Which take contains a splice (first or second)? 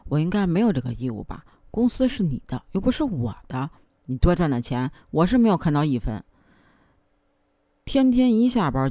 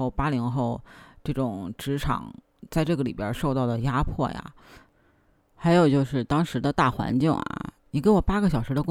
second